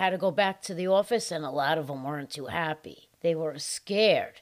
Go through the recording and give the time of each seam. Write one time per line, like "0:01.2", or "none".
0:03.1